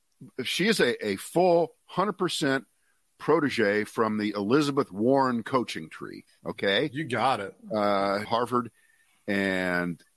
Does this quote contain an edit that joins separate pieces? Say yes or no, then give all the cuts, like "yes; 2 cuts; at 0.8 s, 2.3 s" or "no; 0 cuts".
yes; 1 cut; at 8.2 s